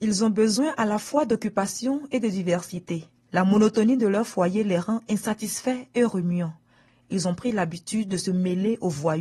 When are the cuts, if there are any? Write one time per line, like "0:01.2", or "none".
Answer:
none